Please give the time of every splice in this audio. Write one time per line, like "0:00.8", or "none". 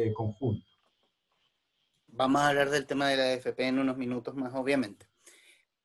0:02.1